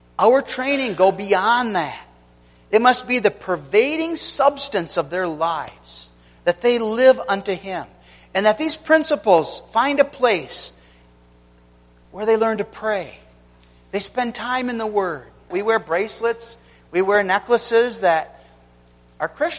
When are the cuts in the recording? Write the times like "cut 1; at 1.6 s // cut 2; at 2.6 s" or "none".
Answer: cut 1; at 15.5 s